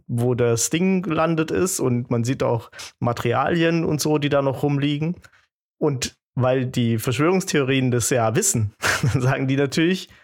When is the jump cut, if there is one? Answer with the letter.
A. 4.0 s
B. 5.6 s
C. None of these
C